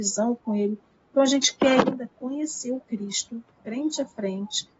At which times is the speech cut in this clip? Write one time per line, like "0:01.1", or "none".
none